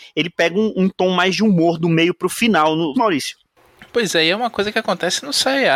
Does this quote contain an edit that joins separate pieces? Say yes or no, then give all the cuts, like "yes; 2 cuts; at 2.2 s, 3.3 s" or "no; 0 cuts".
yes; 1 cut; at 2.9 s